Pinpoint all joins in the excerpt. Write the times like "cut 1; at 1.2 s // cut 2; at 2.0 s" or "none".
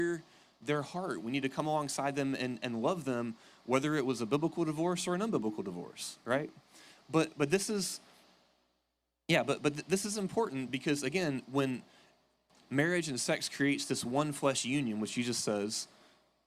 none